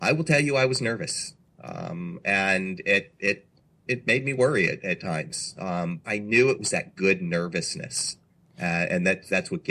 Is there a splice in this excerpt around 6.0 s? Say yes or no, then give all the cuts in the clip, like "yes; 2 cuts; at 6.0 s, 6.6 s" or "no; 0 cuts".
yes; 2 cuts; at 3.9 s, 6.0 s